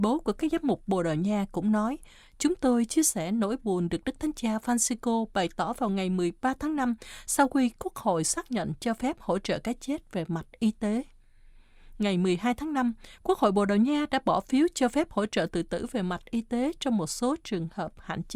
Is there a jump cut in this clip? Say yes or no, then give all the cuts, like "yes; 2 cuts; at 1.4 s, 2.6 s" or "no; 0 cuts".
no; 0 cuts